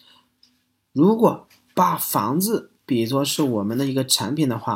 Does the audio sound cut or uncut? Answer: uncut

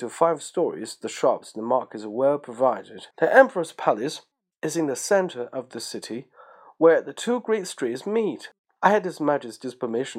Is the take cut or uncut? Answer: cut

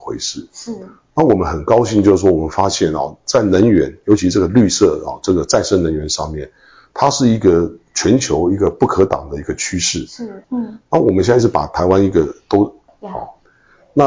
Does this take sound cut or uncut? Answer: cut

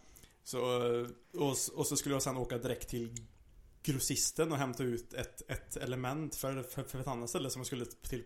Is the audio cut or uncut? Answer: cut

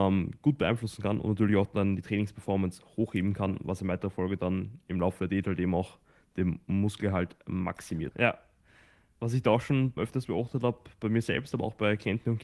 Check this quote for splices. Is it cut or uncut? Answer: cut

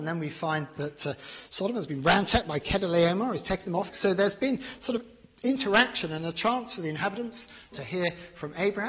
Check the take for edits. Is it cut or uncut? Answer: cut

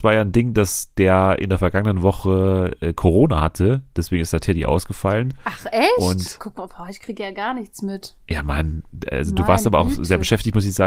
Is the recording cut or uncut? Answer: uncut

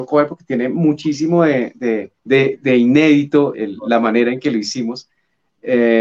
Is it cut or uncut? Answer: cut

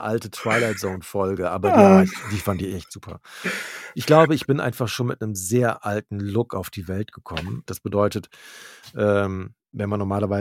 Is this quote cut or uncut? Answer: cut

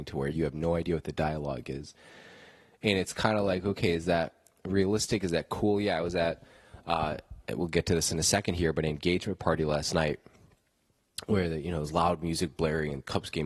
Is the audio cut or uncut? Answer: uncut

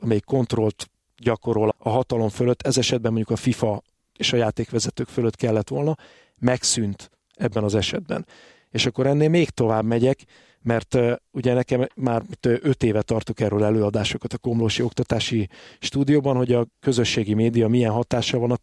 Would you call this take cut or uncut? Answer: cut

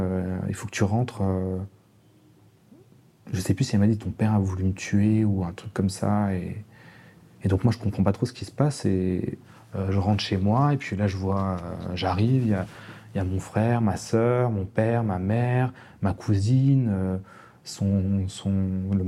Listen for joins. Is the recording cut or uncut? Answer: uncut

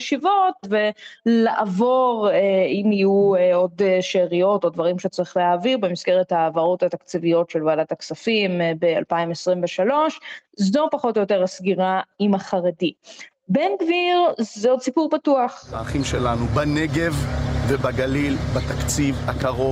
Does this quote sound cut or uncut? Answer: uncut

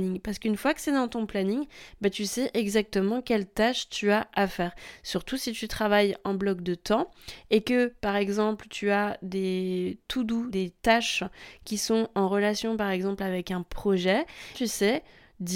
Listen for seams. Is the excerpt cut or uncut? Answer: cut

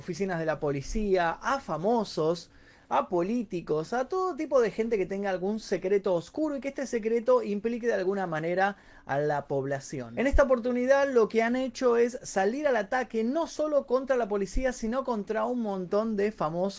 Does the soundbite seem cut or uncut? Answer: uncut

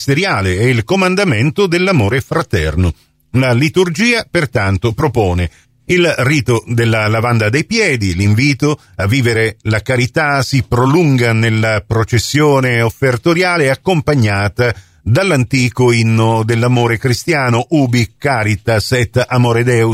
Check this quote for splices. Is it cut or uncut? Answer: uncut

